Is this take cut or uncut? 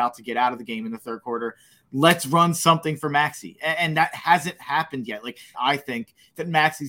cut